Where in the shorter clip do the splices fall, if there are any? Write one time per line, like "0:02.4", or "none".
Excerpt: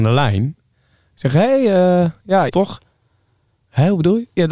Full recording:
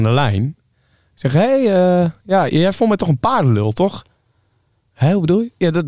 0:02.5

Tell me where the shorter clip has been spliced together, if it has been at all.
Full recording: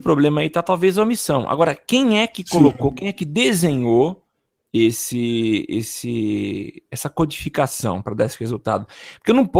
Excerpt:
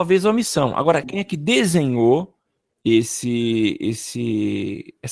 0:01.0

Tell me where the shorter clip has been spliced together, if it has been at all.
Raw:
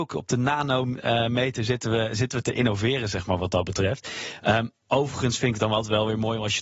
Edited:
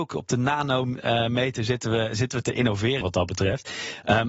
0:03.0

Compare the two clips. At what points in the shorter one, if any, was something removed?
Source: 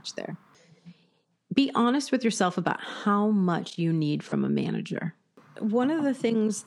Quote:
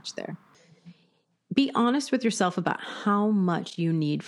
none

